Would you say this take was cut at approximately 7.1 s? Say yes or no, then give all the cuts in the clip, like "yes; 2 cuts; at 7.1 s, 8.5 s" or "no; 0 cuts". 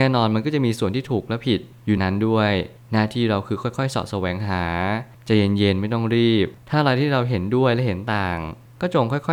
no; 1 cut; at 2.0 s